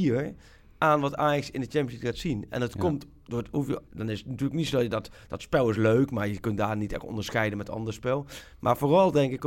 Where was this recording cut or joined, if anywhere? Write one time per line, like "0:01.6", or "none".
0:03.9